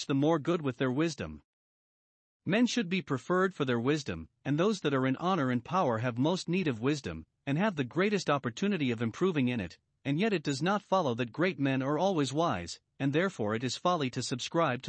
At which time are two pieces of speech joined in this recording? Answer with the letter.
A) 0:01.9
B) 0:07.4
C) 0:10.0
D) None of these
D